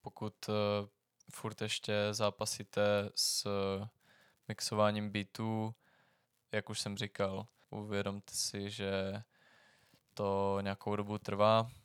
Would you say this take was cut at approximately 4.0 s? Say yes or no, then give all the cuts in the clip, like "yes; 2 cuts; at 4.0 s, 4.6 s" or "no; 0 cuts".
no; 2 cuts; at 6.5 s, 7.6 s